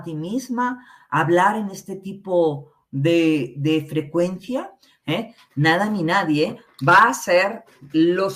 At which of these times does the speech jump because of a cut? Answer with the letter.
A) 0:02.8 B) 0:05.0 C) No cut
B